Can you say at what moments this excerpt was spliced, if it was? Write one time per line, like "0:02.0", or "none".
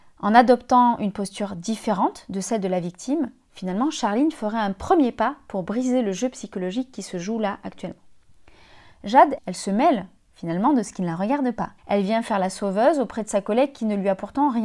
0:09.4
0:11.8